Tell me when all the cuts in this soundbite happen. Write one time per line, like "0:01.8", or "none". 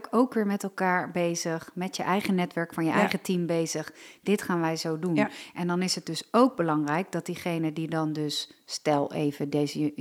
none

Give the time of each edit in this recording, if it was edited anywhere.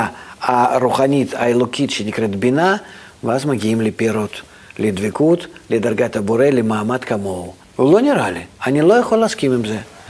0:07.6

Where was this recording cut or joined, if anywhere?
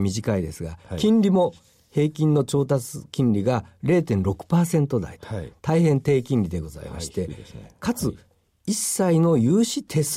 none

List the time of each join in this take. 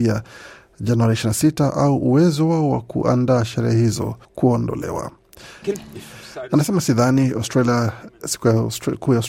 0:04.2
0:05.6

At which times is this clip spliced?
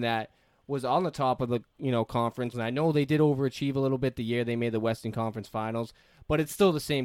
0:02.5

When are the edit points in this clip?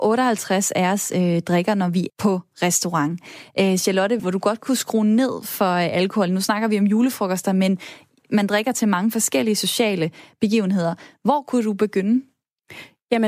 0:02.1
0:04.2

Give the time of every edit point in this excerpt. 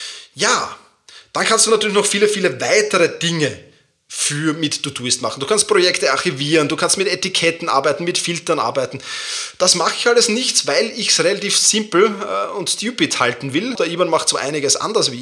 0:13.7

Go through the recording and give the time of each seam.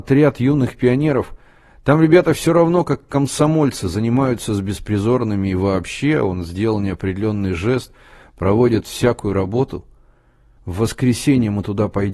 0:10.6

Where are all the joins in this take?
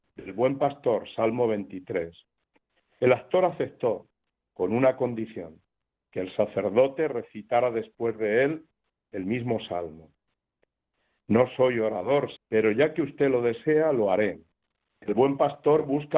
0:12.4
0:14.9

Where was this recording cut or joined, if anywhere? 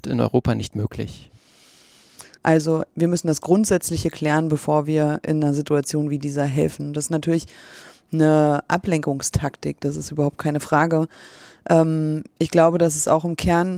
0:02.4

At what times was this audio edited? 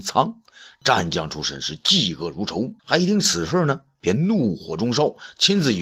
0:02.8

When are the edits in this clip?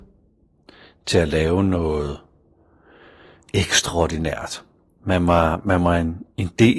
none

